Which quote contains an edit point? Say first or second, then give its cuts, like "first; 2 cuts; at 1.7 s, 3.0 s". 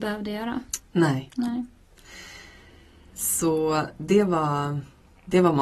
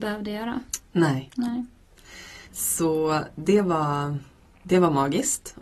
second; 1 cut; at 2.5 s